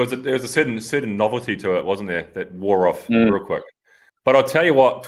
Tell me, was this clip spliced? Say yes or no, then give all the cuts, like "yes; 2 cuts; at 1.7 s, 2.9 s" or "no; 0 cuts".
yes; 1 cut; at 4.1 s